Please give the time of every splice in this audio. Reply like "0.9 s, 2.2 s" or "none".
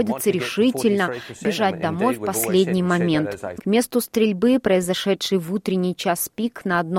3.6 s